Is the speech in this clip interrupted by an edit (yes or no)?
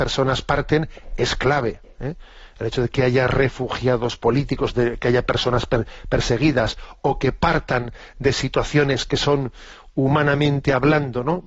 no